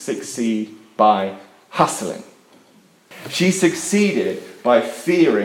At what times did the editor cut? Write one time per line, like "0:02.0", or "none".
0:03.1